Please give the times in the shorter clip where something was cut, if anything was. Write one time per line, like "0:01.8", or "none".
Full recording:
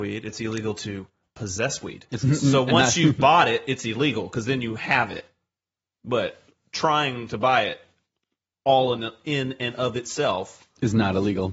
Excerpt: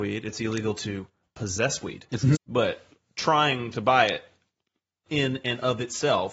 0:02.4
0:05.1